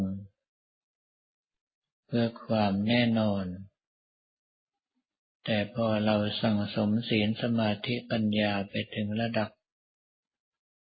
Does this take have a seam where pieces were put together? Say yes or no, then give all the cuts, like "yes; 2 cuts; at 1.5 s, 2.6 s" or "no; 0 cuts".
no; 0 cuts